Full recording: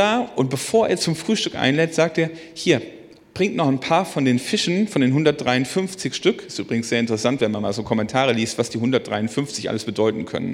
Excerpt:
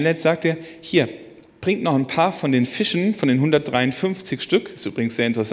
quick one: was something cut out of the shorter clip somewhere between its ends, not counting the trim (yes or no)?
no